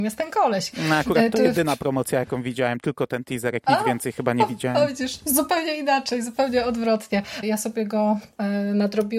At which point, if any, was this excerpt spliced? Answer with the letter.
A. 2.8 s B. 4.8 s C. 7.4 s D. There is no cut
C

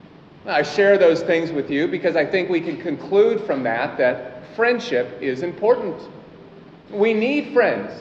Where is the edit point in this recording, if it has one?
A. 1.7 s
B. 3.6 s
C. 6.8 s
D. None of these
D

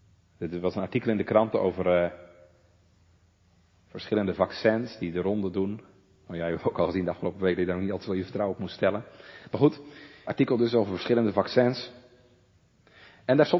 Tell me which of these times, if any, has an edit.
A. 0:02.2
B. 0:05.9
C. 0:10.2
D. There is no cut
C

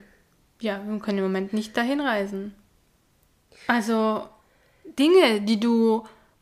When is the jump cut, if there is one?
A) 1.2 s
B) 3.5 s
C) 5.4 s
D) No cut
D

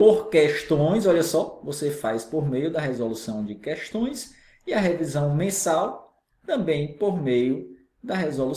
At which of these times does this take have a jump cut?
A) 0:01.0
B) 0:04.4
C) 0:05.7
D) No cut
D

